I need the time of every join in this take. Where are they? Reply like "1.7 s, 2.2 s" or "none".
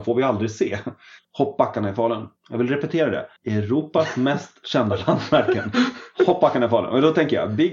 1.2 s